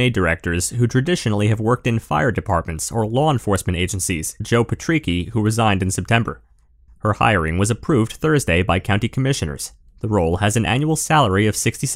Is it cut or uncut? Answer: cut